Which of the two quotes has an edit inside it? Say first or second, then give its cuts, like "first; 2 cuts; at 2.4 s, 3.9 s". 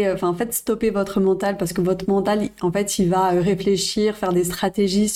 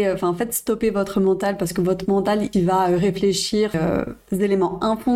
second; 2 cuts; at 2.5 s, 3.7 s